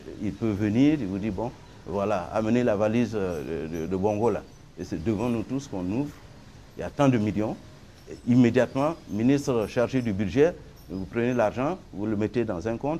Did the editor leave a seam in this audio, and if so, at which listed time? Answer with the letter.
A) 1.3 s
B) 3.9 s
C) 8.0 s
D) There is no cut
B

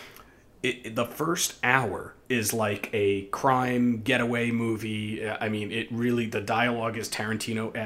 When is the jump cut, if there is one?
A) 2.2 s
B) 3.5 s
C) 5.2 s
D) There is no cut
A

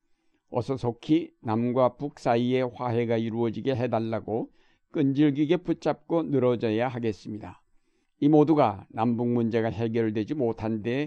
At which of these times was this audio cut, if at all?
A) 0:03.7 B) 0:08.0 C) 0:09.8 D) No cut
B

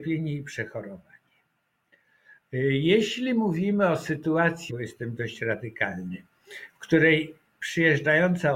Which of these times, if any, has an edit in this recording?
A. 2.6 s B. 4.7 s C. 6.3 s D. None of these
B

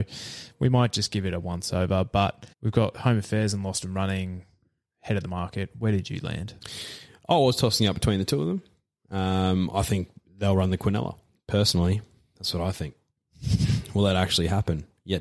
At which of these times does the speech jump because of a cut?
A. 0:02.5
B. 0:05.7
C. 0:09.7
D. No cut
A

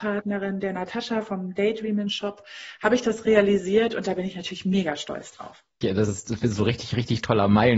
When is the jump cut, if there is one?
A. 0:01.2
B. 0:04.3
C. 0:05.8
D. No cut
C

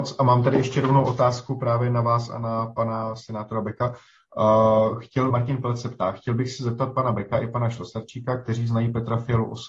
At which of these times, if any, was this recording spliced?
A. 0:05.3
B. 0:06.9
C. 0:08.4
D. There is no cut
A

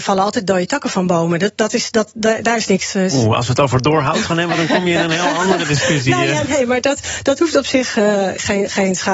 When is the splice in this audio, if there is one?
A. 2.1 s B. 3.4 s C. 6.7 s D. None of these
D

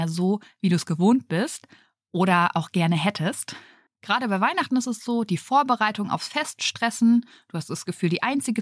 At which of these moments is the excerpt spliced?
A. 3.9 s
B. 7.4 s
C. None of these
A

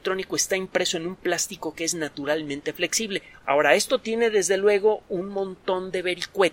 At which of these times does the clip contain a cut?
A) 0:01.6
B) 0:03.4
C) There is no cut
B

